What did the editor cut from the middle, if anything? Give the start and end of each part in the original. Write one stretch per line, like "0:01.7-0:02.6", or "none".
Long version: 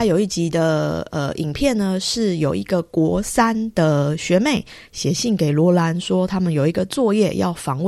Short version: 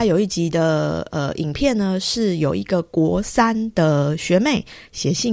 none

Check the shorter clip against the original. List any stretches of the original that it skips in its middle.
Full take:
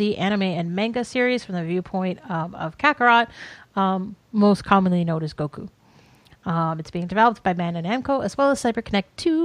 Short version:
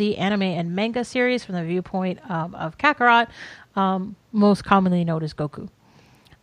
none

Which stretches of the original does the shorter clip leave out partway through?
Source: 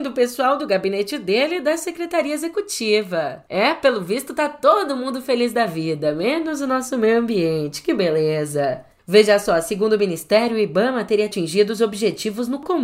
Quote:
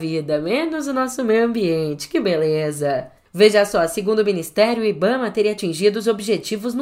none

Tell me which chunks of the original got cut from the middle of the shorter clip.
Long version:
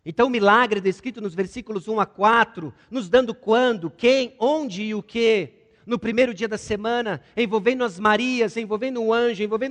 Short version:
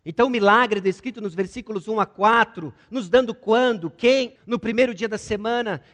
0:04.4-0:05.8

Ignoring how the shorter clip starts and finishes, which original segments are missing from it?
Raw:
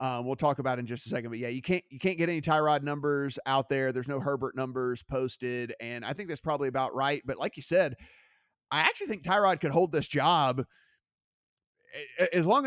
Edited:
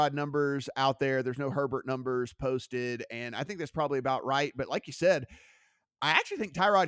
none

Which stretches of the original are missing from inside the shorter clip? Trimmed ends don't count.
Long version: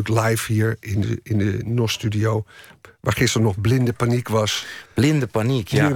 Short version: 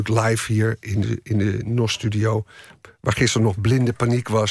none

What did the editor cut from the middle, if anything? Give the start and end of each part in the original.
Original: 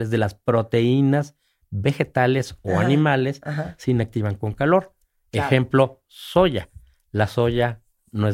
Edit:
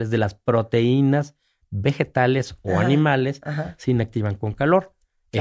none

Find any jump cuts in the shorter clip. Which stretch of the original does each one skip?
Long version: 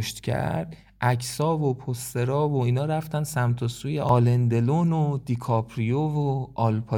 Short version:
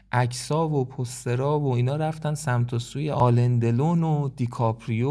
none

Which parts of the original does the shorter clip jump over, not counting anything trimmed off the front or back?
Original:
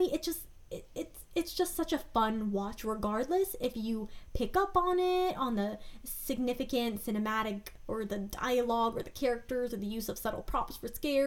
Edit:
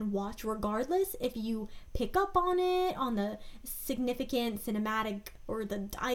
none

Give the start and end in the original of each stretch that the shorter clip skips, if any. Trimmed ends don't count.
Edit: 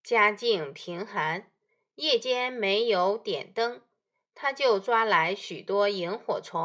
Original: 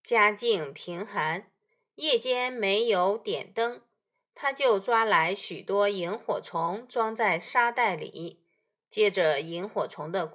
none

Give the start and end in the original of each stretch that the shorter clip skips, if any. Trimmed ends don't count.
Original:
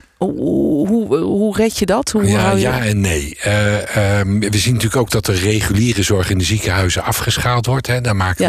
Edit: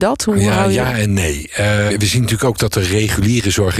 0:03.8-0:04.4

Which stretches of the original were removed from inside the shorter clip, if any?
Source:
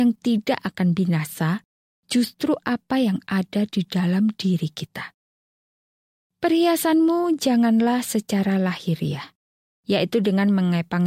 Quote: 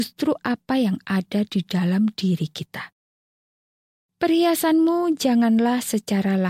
none

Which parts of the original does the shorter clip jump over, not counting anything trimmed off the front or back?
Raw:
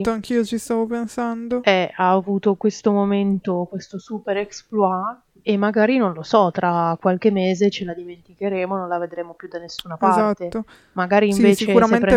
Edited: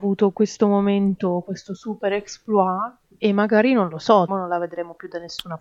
0:06.5-0:08.7

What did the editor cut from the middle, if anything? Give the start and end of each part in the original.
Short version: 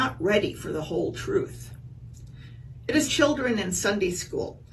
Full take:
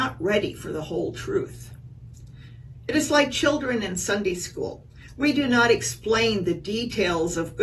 0:03.1-0:03.3

